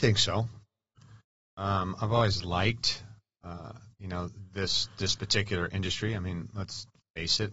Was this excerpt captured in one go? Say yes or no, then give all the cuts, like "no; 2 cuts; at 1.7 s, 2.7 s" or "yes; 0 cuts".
yes; 0 cuts